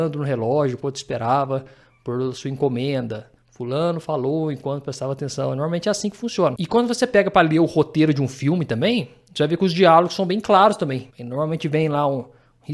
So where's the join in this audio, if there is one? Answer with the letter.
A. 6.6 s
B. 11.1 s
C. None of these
B